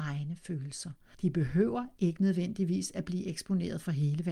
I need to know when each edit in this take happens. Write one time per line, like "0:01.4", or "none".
0:01.1